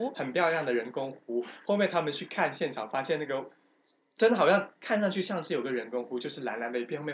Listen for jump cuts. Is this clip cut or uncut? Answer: uncut